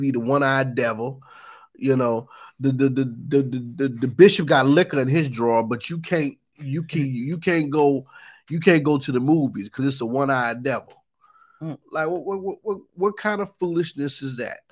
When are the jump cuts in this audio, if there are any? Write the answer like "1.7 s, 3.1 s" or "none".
none